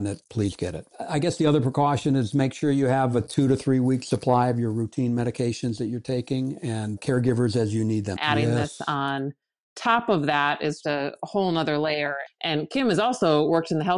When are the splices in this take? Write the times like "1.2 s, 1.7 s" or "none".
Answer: 8.2 s, 10.8 s, 12.3 s

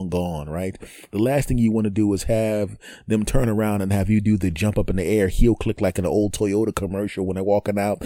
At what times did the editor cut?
none

